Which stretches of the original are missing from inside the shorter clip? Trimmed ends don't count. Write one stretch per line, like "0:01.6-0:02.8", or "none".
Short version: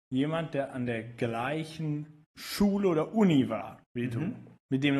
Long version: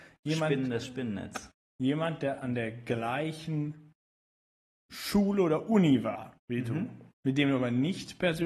0:04.0-0:04.8